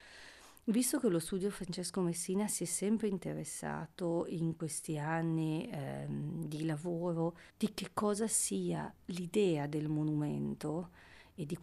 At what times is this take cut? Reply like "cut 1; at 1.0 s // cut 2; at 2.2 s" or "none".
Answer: cut 1; at 7.5 s // cut 2; at 9.0 s